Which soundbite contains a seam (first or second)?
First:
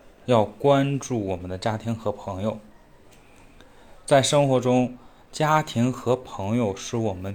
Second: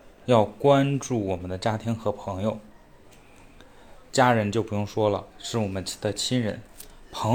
second